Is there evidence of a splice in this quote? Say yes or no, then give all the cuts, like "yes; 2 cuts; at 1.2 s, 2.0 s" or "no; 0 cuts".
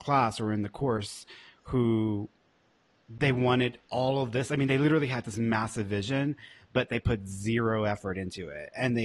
no; 0 cuts